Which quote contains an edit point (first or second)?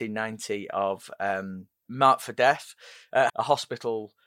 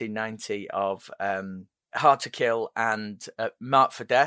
first